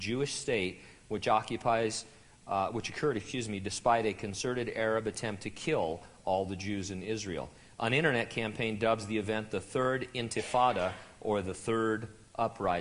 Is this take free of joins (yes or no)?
yes